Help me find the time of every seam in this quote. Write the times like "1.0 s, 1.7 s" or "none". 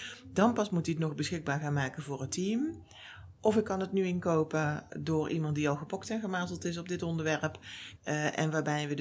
4.9 s, 8.0 s